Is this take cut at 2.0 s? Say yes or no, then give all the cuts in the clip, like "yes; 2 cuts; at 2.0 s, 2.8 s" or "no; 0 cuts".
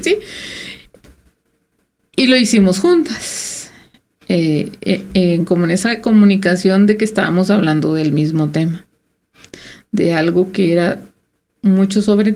no; 1 cut; at 5.1 s